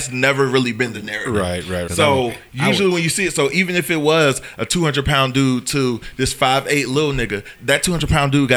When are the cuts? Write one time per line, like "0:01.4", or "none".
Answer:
0:01.9
0:07.5